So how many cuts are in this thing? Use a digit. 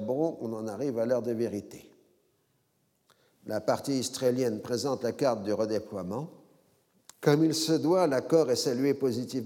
1